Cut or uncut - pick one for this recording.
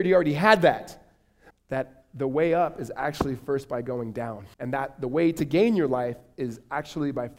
cut